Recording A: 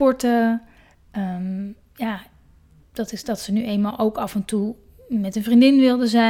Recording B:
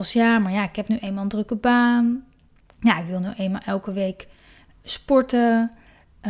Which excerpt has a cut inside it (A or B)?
A